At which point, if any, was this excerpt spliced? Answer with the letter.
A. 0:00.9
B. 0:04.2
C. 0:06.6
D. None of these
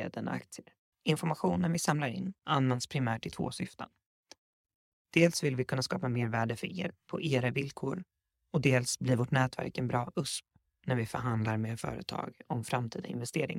A